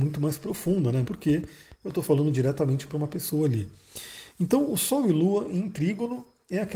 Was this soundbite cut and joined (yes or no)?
yes